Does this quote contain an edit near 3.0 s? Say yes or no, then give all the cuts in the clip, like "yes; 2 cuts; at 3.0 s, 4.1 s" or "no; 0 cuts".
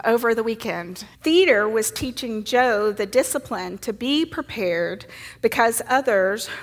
no; 1 cut; at 1.1 s